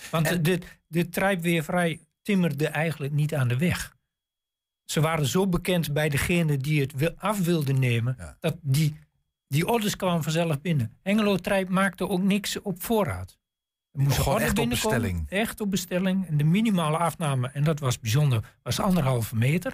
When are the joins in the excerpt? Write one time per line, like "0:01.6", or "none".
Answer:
none